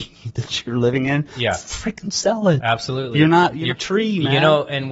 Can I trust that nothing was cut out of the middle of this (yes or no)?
no